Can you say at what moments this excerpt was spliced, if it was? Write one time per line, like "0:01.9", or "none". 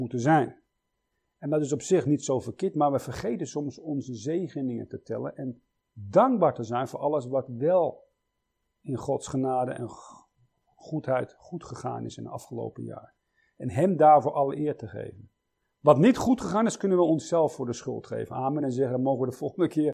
none